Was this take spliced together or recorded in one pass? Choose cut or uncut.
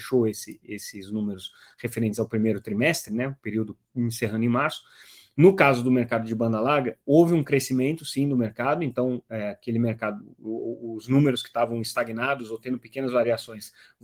uncut